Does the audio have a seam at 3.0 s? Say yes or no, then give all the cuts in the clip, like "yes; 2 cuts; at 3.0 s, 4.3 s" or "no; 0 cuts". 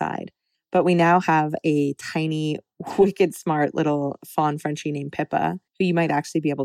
no; 1 cut; at 5.7 s